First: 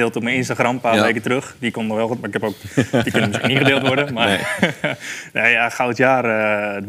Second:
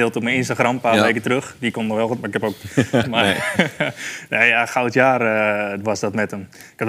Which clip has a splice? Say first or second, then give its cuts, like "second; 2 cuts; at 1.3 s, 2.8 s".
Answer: second; 1 cut; at 3.0 s